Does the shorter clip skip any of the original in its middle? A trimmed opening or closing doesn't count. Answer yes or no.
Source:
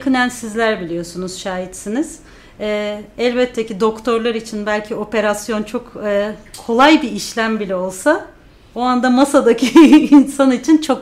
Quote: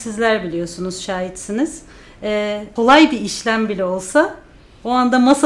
yes